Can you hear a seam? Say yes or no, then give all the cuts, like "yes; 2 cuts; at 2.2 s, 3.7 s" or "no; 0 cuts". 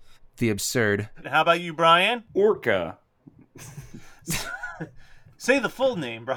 yes; 1 cut; at 1.2 s